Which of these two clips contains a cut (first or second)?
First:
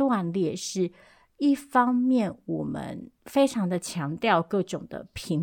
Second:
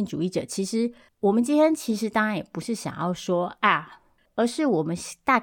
second